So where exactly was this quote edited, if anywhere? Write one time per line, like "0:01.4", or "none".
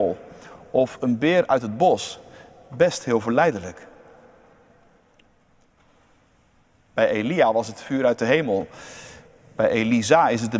none